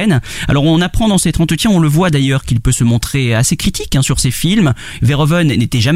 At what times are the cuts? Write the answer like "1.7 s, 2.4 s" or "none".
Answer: 5.0 s